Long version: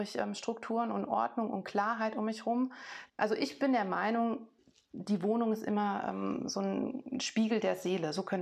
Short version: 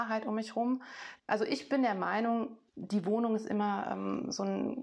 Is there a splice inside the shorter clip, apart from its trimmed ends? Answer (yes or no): yes